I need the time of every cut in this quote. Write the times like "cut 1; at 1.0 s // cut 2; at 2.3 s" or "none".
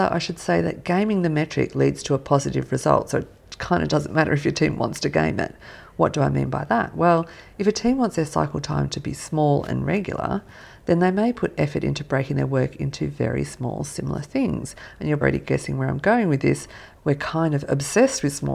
cut 1; at 15.2 s // cut 2; at 17.0 s